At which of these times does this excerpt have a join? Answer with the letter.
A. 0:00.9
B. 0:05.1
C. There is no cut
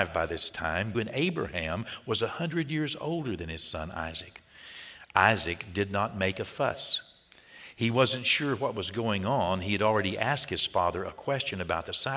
A